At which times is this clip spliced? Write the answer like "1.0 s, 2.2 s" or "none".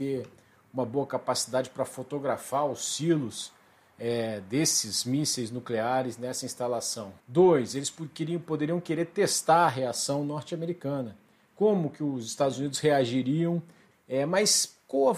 7.2 s, 13.9 s